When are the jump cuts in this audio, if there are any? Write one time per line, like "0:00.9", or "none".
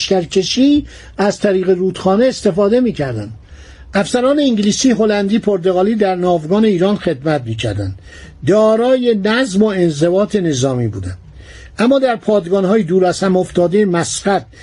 0:03.9

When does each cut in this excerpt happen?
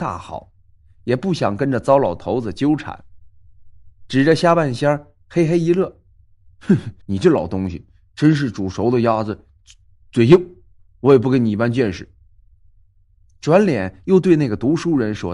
0:07.0
0:10.8

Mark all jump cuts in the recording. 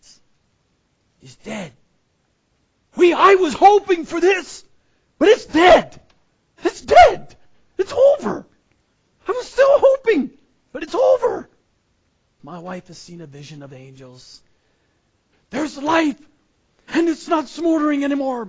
0:12.4
0:15.3

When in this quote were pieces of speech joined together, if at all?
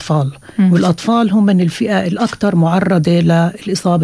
none

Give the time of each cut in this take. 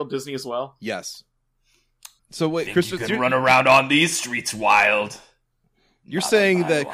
0:02.2

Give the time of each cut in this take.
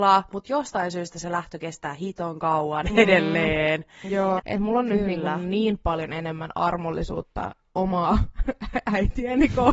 0:04.4

